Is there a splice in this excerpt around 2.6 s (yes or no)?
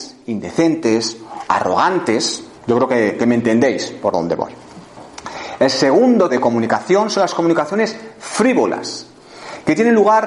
yes